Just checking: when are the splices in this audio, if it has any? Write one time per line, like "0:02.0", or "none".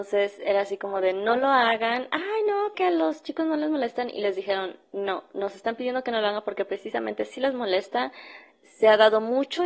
0:02.7